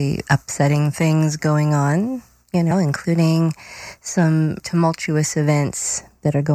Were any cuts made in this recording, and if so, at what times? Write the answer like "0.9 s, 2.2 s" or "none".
2.7 s, 4.6 s